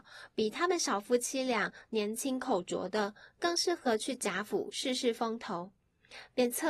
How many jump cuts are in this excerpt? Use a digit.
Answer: 0